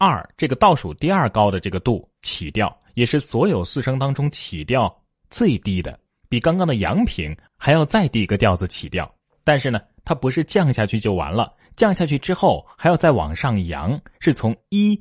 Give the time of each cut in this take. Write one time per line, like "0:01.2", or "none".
none